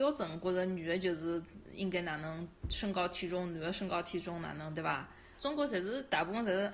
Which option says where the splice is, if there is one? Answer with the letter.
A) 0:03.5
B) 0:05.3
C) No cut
B